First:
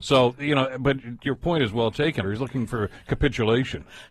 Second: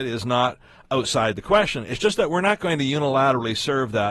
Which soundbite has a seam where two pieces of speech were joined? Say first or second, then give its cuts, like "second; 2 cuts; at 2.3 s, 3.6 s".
first; 1 cut; at 2.2 s